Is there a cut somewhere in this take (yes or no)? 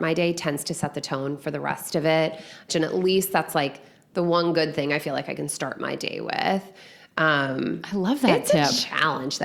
yes